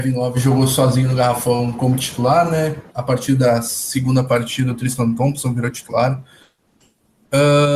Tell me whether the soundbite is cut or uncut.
cut